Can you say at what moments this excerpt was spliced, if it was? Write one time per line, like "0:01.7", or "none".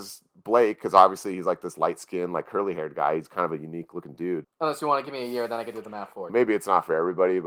0:04.4
0:06.3